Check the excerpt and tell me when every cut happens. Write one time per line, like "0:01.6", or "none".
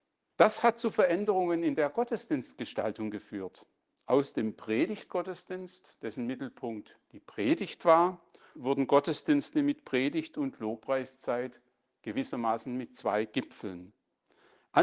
0:08.6